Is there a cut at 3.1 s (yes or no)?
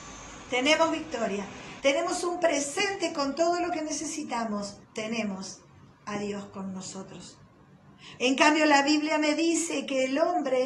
no